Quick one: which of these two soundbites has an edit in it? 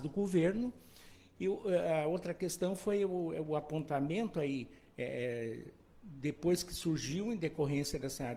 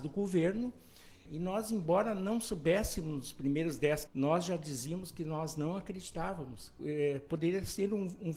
second; 3 cuts; at 1.3 s, 4.1 s, 6.8 s

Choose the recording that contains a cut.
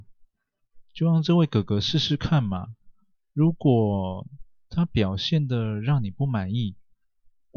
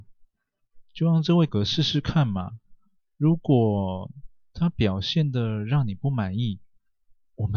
second; 1 cut; at 1.5 s

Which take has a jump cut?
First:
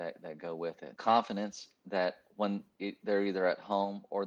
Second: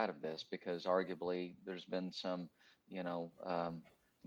first; 1 cut; at 0.9 s

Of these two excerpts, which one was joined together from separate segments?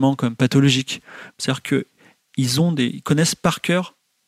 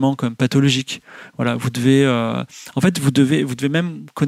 first; 1 cut; at 1.3 s

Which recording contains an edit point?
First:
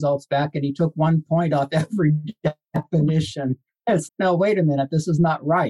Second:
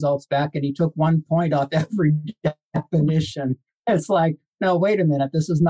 first; 1 cut; at 4.1 s

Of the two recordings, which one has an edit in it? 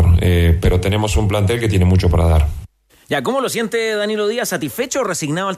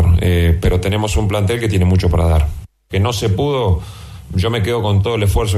second; 1 cut; at 2.9 s

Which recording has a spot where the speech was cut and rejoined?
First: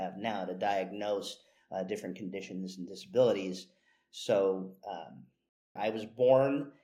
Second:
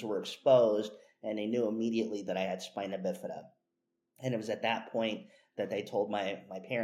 first; 1 cut; at 5.8 s

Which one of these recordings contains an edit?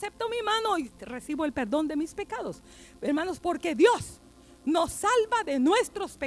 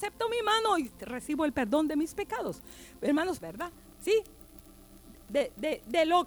second; 1 cut; at 3.4 s

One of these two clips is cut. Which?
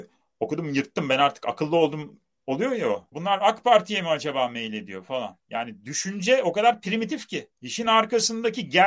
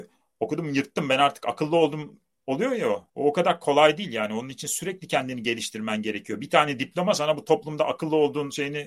first; 1 cut; at 3.1 s

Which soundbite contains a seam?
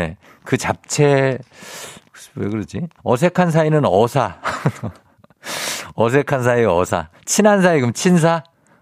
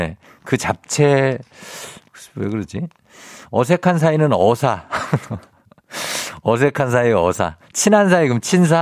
first; 1 cut; at 3.0 s

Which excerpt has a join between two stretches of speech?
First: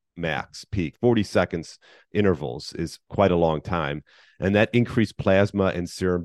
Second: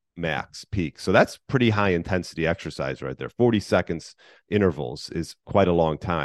first; 1 cut; at 0.9 s

